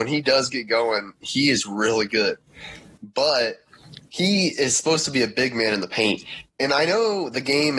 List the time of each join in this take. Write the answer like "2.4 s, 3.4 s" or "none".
none